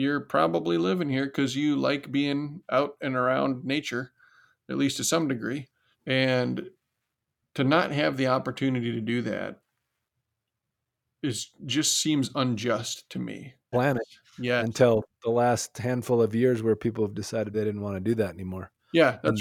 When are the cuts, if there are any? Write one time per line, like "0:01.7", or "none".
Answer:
0:05.9
0:13.7
0:17.5